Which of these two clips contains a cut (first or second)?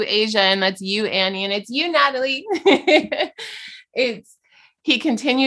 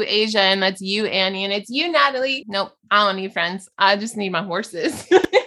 second